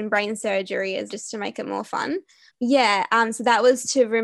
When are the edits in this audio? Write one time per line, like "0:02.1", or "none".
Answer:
0:01.1
0:02.5